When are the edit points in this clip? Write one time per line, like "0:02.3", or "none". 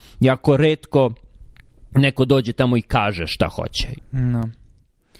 0:03.9